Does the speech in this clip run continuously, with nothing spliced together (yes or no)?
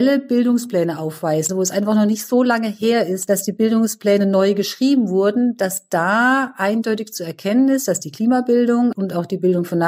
no